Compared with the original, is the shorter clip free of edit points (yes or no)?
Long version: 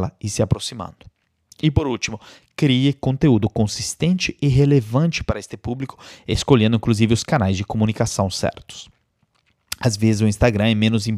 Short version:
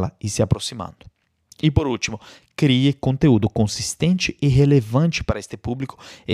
yes